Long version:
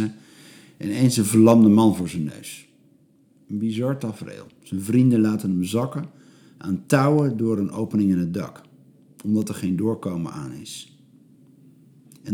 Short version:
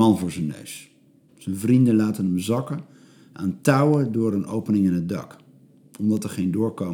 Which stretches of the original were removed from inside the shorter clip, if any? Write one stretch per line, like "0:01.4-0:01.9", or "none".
0:03.1-0:04.5